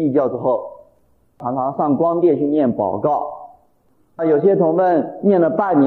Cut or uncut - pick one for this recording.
uncut